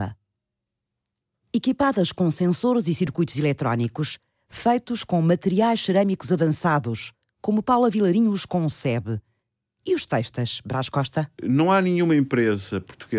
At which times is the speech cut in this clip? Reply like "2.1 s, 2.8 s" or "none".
none